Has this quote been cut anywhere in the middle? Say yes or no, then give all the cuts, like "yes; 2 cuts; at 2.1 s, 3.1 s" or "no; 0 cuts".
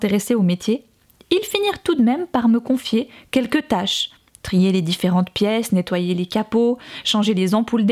no; 0 cuts